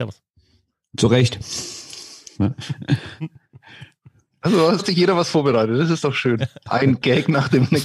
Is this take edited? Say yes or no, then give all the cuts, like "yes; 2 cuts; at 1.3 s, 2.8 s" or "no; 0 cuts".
yes; 1 cut; at 4.8 s